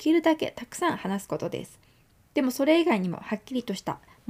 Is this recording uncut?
yes; 0 cuts

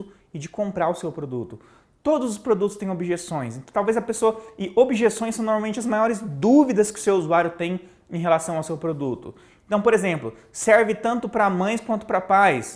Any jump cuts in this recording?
no; 0 cuts

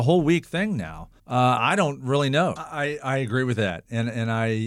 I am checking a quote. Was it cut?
yes; 2 cuts; at 1.2 s, 2.6 s

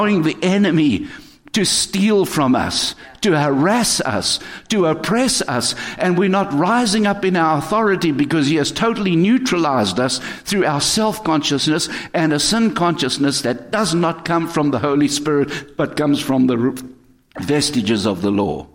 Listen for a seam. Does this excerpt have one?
no; 0 cuts

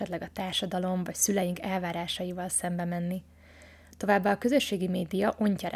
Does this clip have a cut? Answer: no; 0 cuts

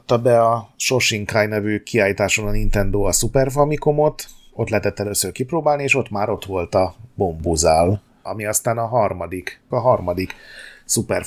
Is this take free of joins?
no; 2 cuts; at 8.3 s, 9.7 s

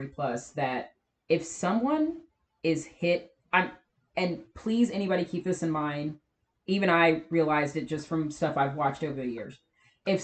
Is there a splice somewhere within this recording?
yes; 1 cut; at 3.4 s

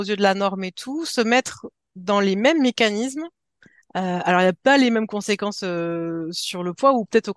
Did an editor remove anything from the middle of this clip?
no; 0 cuts

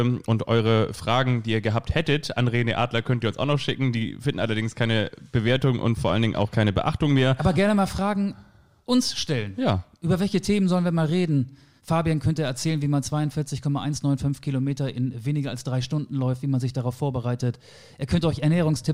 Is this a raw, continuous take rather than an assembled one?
no; 1 cut; at 11.8 s

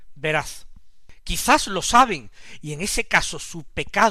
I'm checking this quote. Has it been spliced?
no; 0 cuts

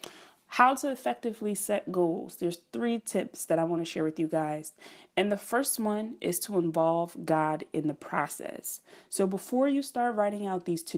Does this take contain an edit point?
no; 0 cuts

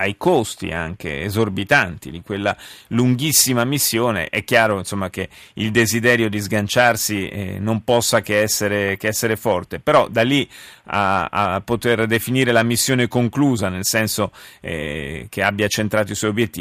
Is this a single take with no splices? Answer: yes; 0 cuts

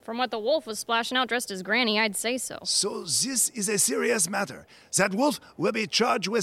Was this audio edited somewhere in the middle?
no; 0 cuts

